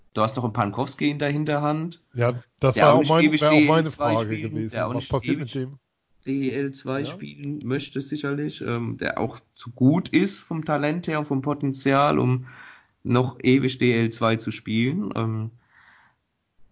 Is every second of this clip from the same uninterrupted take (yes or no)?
yes